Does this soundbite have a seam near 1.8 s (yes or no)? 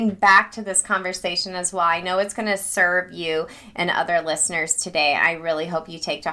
no